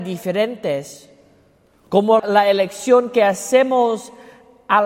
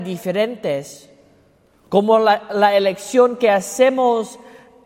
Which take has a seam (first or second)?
first